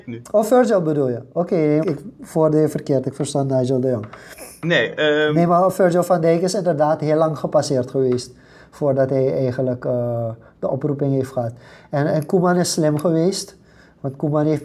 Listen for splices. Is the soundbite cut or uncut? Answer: cut